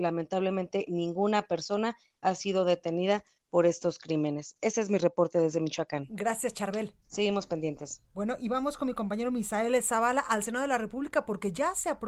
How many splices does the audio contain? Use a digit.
2